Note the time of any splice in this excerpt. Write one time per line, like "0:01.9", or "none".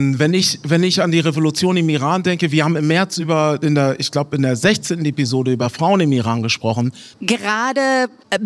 0:07.1